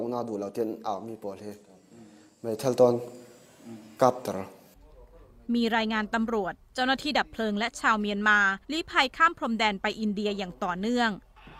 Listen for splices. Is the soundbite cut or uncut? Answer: cut